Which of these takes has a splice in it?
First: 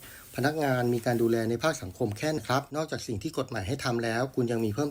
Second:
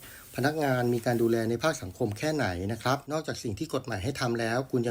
first; 1 cut; at 2.4 s

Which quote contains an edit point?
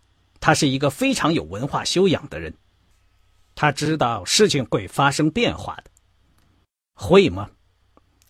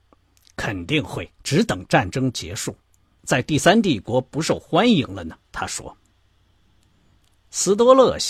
second; 3 cuts; at 1.3 s, 3.2 s, 5.4 s

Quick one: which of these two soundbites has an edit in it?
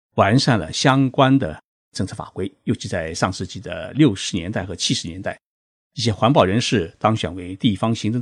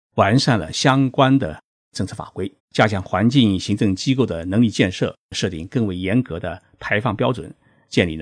second; 1 cut; at 2.6 s

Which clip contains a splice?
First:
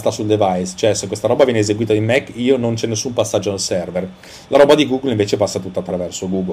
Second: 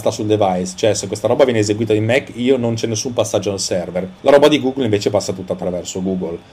second; 1 cut; at 4.2 s

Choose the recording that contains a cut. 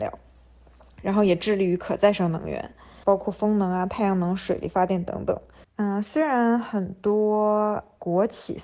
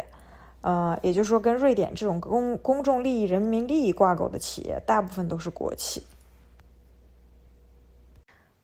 first; 2 cuts; at 3.0 s, 5.6 s

